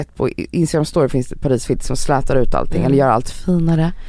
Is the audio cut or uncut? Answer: uncut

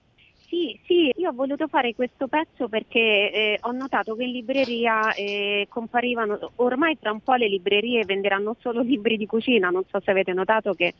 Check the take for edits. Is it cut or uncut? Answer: cut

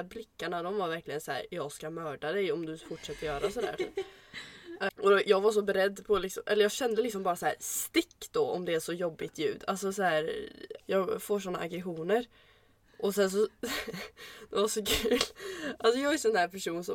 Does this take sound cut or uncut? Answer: cut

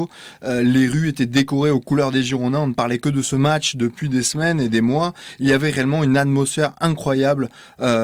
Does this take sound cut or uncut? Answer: uncut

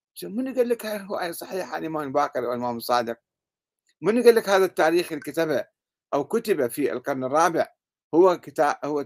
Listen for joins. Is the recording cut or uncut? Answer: uncut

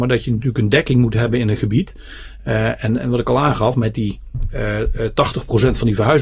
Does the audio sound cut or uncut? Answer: uncut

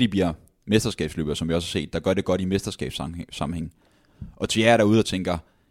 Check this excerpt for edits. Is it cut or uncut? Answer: uncut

